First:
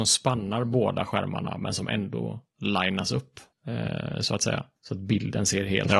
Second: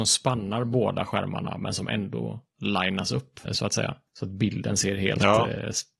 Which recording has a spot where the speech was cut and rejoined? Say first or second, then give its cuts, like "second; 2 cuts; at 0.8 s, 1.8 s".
second; 1 cut; at 3.5 s